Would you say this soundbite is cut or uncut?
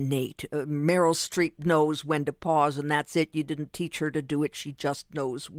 uncut